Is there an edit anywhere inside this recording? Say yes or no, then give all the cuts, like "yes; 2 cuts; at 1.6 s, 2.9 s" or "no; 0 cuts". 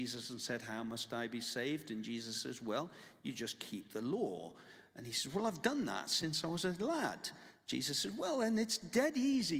no; 0 cuts